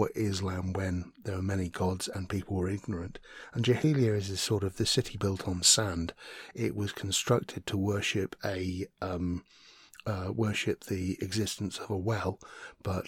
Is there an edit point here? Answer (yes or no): no